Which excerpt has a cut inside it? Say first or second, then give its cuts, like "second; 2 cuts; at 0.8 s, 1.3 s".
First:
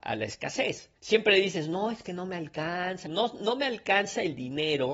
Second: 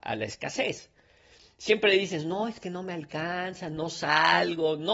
first; 2 cuts; at 1.0 s, 3.1 s